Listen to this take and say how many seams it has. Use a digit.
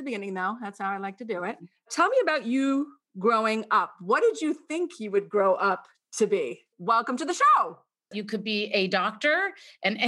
2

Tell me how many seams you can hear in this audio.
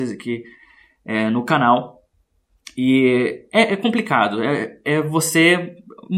0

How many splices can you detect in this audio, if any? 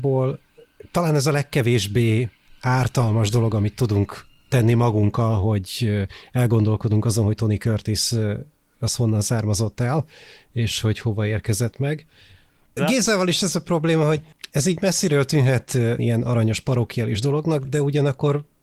3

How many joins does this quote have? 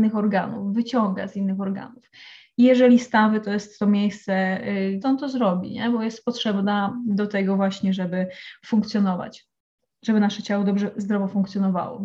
1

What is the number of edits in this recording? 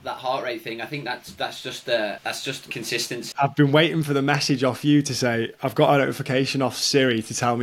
2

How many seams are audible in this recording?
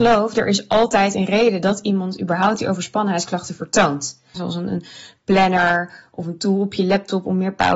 1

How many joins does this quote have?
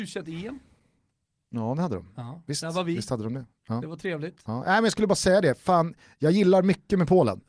0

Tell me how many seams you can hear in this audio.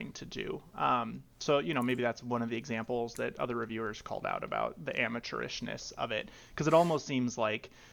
0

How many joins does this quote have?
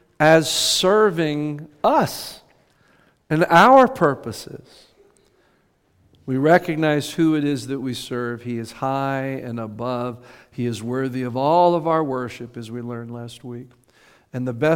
0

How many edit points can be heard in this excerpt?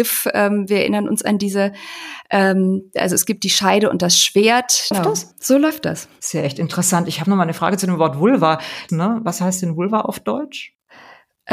2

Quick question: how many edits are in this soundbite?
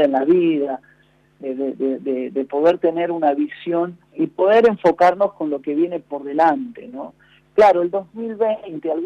2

